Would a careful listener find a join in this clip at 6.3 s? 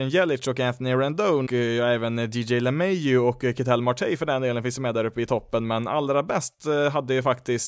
no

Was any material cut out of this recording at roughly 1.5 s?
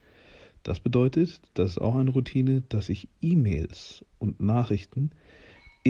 no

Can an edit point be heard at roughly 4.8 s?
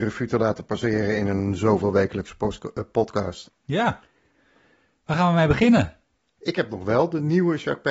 no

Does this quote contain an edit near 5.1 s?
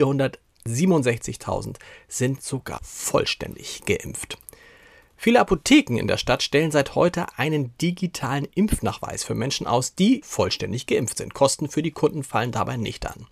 no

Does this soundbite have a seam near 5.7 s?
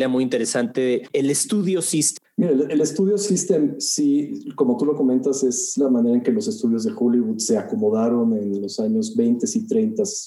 yes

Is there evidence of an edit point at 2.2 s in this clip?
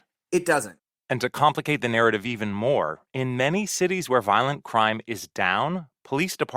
no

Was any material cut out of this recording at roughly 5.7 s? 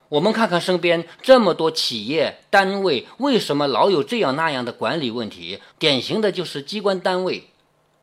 yes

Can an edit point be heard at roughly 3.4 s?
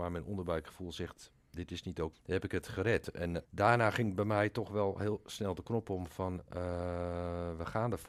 yes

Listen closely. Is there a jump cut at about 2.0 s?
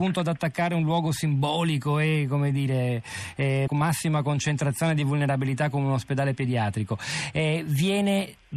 no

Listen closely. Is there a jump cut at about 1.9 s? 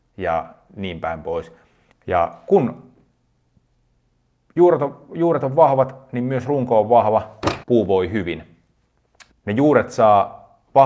yes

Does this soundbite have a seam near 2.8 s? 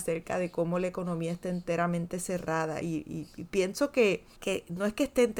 no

